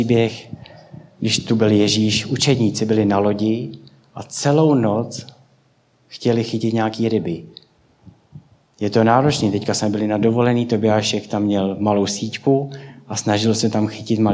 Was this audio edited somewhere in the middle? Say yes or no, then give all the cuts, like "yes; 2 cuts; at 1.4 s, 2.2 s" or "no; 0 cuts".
no; 0 cuts